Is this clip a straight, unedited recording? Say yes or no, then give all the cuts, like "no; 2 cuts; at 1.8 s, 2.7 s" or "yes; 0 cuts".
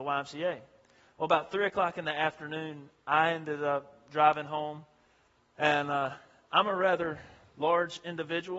yes; 0 cuts